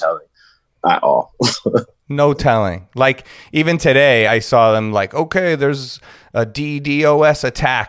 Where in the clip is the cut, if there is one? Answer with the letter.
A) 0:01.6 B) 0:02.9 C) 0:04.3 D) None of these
C